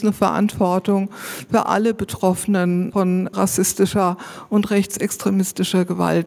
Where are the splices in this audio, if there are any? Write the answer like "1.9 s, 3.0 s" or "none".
none